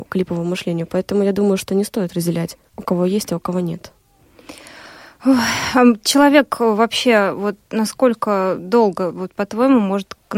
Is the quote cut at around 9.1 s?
no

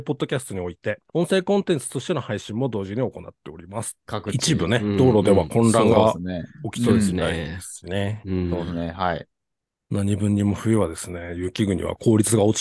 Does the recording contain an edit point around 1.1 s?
yes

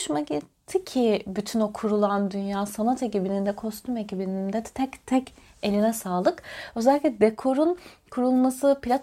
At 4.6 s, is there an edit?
no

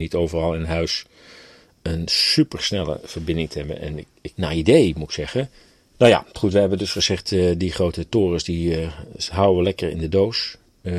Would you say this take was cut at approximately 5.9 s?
yes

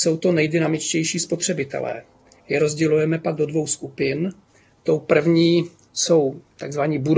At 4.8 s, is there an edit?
no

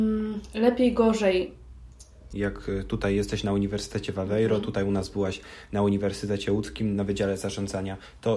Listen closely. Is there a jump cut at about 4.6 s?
no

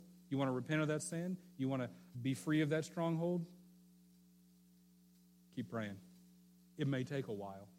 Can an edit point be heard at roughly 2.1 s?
yes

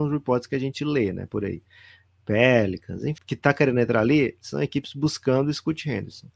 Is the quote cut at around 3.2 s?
yes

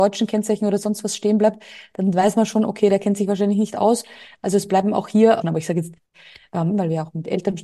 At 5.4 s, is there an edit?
yes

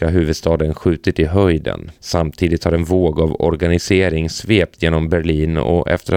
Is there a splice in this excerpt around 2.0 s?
yes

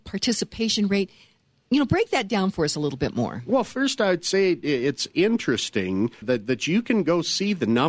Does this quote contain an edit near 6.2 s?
yes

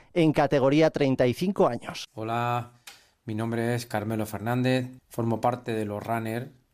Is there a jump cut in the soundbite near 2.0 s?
yes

